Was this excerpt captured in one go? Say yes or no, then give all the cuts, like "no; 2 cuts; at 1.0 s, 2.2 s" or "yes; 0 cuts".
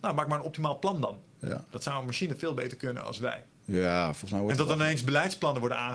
yes; 0 cuts